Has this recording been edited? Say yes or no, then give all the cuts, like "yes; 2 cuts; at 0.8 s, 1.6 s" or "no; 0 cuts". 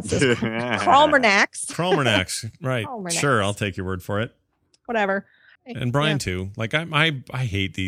yes; 1 cut; at 5.6 s